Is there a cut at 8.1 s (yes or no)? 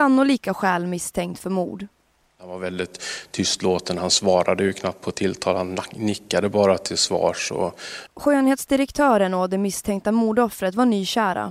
yes